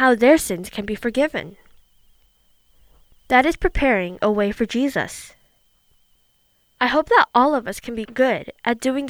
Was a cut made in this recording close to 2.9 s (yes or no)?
no